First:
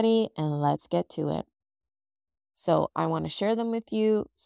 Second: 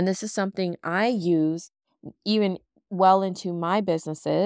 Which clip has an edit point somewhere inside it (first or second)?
first